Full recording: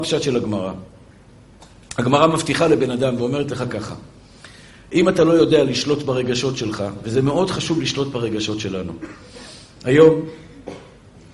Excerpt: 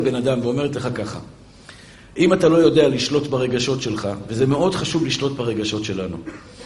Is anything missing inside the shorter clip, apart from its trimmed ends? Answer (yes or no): no